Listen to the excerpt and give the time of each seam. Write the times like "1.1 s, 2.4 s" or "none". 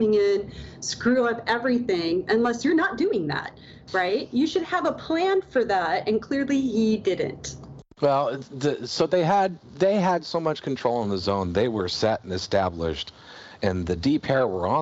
7.9 s